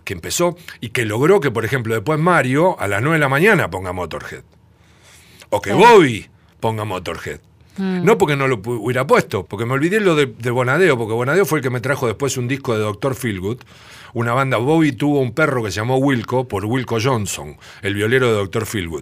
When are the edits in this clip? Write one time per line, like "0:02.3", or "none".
0:09.5